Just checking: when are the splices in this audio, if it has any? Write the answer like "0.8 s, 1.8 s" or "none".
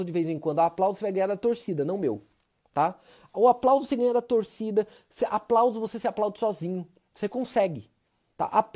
none